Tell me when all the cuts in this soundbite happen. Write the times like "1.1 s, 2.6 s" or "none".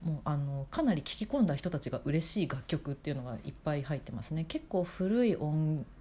none